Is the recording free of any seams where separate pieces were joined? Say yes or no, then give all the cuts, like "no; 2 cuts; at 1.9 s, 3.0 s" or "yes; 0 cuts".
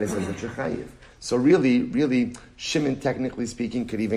no; 1 cut; at 1.1 s